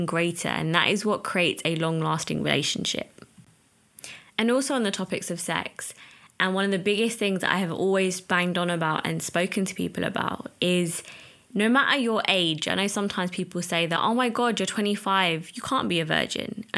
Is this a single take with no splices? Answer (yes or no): yes